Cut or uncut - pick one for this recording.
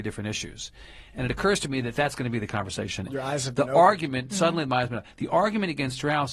cut